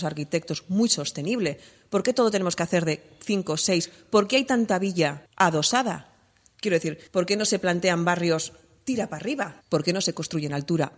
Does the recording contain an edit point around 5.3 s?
yes; 3 cuts; at 5.3 s, 7.1 s, 9.6 s

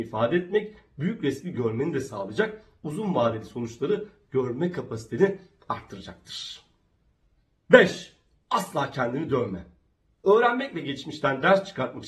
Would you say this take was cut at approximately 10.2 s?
no; 0 cuts

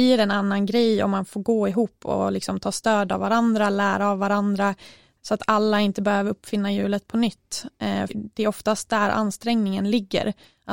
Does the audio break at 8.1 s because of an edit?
yes; 1 cut; at 8.1 s

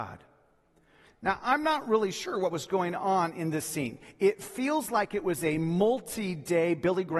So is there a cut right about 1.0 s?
yes; 1 cut; at 1.0 s

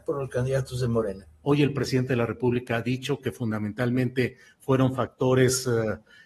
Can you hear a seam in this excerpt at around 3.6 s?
no; 1 cut; at 1.4 s

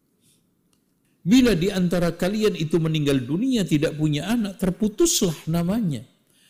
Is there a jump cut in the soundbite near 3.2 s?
no; 1 cut; at 1.0 s

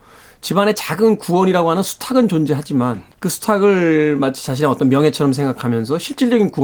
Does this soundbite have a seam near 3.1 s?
yes; 1 cut; at 3.1 s

